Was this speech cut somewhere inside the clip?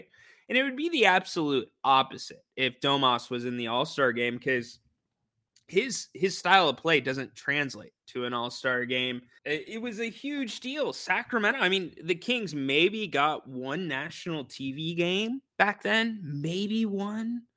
yes; 2 cuts; at 9.4 s, 15.5 s

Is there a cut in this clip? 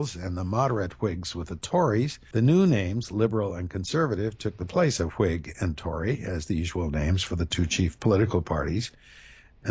no; 0 cuts

